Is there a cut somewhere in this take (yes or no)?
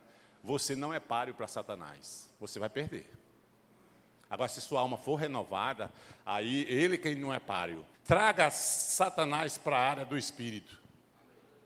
yes